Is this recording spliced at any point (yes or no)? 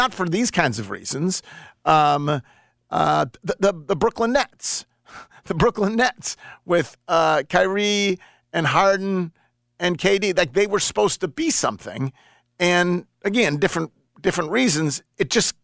no